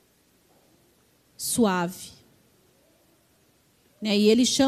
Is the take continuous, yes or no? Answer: yes